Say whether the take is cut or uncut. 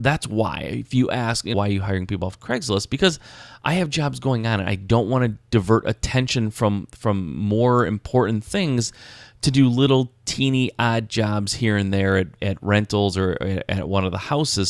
cut